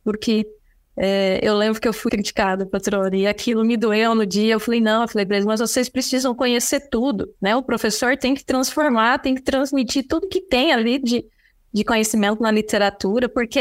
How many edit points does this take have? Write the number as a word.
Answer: one